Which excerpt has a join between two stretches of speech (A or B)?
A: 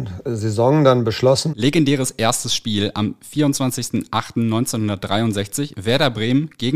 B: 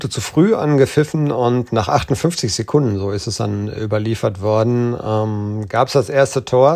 A